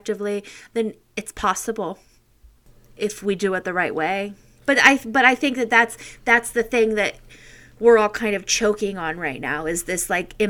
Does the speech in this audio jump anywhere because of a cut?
yes; 1 cut; at 4.6 s

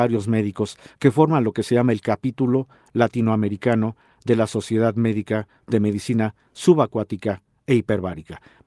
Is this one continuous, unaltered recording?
yes; 0 cuts

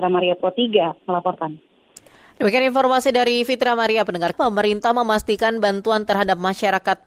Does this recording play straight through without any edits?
no; 1 cut; at 4.3 s

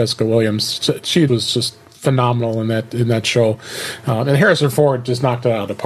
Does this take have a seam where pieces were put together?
yes; 1 cut; at 1.3 s

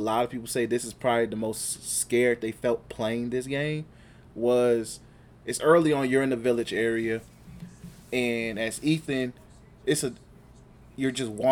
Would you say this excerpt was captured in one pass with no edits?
yes; 0 cuts

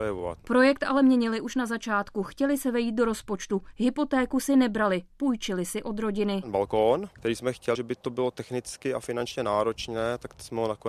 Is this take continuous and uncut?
no; 1 cut; at 7.7 s

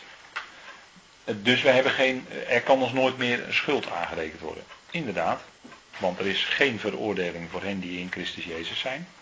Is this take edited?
yes; 1 cut; at 5.9 s

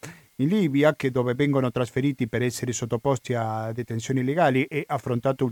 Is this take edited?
no; 0 cuts

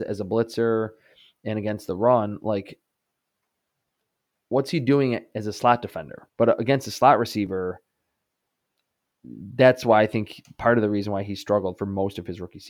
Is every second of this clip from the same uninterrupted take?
no; 1 cut; at 6.3 s

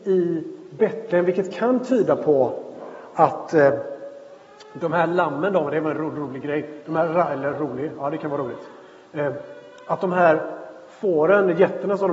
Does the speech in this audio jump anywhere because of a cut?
no; 0 cuts

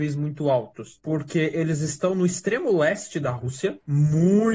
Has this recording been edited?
no; 0 cuts

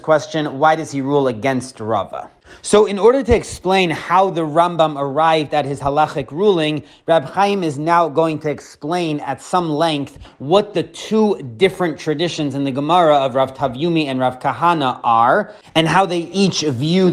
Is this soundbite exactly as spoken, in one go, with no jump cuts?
yes; 0 cuts

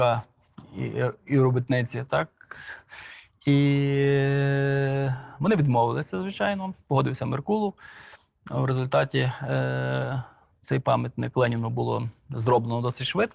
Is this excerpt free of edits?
yes; 0 cuts

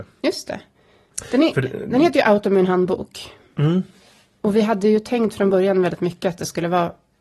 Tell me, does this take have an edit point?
no; 0 cuts

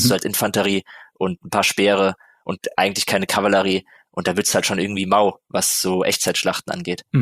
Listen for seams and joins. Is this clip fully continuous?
yes; 0 cuts

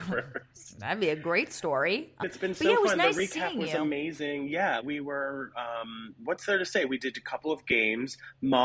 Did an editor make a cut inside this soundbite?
yes; 2 cuts; at 2.2 s, 4.8 s

